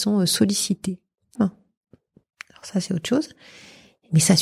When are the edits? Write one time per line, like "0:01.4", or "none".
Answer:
0:01.4